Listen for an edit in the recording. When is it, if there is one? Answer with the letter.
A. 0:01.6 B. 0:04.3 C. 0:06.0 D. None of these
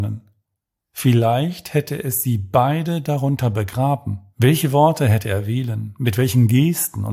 B